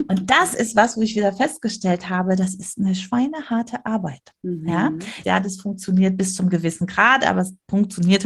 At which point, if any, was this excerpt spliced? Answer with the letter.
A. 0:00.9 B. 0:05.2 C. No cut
B